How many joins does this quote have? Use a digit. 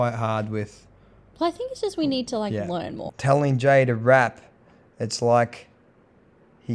1